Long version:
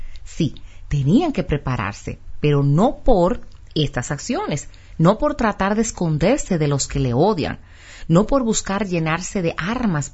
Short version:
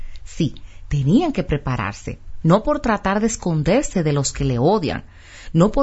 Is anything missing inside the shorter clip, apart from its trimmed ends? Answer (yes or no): yes